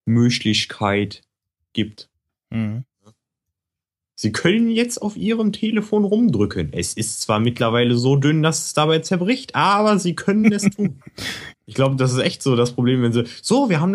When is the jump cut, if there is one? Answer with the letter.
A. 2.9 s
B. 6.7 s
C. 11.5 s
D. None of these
C